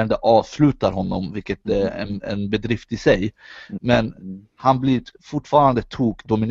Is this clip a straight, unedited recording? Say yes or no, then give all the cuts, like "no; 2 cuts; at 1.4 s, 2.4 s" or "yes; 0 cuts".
no; 1 cut; at 3.8 s